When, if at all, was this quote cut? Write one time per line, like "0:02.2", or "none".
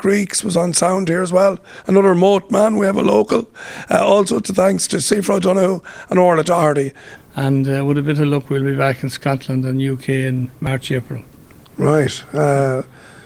0:07.2